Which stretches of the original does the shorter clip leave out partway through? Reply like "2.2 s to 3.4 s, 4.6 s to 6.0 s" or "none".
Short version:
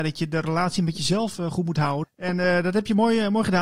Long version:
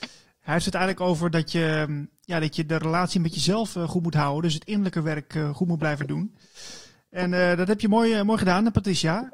4.4 s to 7.0 s